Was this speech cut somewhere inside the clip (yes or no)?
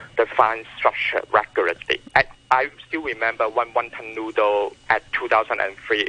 yes